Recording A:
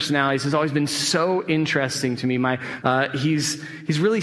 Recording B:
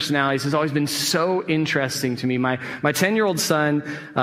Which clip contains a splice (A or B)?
A